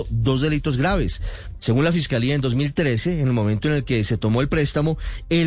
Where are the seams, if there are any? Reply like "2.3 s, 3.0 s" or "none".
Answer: 1.6 s